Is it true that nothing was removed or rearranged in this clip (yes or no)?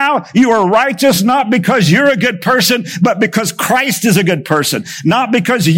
yes